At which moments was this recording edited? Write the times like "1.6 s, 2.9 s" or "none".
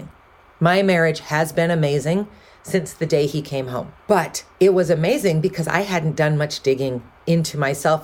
4.0 s